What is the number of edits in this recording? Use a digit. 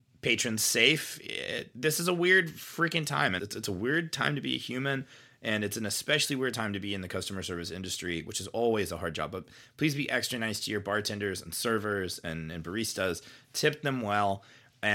2